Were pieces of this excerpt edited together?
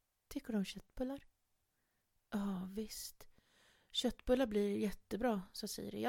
no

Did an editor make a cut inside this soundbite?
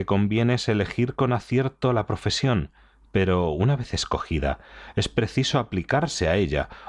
no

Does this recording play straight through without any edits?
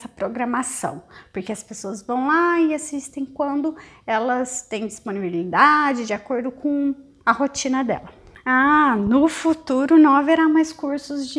yes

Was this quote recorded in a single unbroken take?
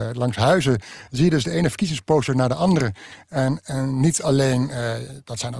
yes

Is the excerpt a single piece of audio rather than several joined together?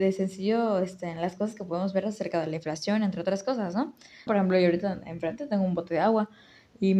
no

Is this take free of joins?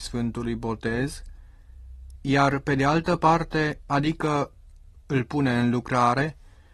no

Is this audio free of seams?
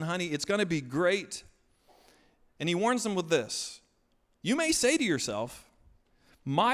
yes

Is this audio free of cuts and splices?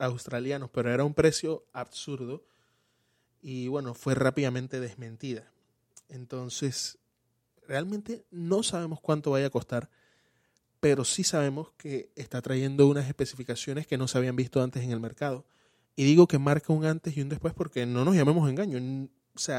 yes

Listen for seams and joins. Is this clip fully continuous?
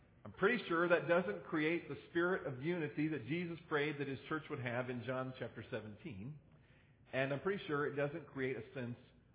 yes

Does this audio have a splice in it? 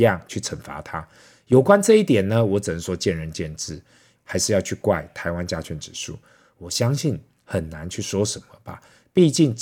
yes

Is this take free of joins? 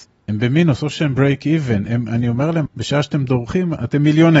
no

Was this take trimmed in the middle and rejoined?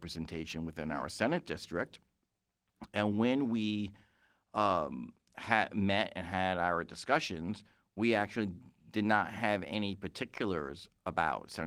no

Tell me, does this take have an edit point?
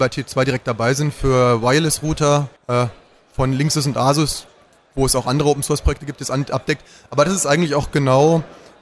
yes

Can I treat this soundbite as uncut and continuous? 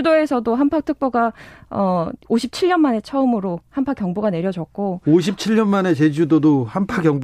yes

